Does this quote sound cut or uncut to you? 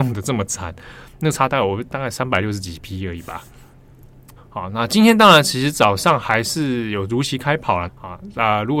cut